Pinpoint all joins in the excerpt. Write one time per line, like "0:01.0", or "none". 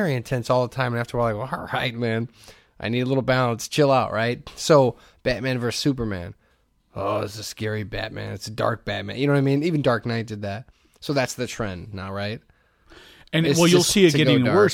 none